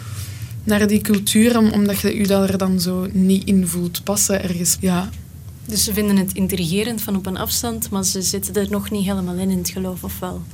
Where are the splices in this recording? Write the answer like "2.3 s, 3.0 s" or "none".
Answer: 4.8 s